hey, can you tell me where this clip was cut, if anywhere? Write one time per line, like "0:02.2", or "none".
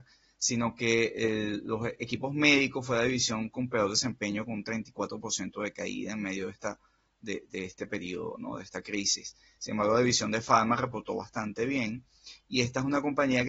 none